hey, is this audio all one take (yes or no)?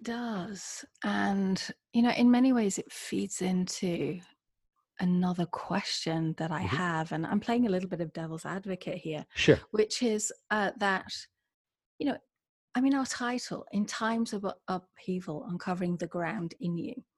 yes